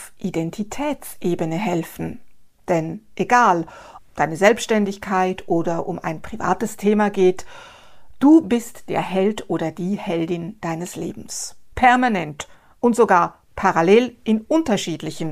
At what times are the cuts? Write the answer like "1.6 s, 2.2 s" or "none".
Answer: 4.0 s, 11.7 s